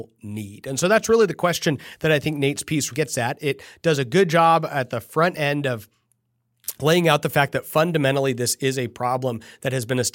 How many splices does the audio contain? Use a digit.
1